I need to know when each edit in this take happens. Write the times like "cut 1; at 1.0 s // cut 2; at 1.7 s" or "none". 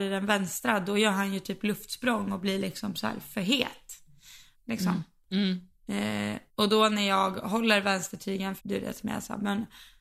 cut 1; at 4.5 s // cut 2; at 6.5 s // cut 3; at 8.6 s